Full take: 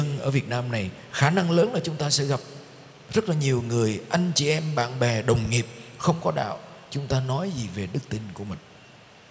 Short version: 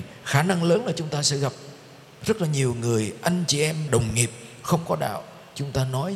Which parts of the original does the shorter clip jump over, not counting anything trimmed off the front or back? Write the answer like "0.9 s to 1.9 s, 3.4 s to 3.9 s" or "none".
4.7 s to 5.2 s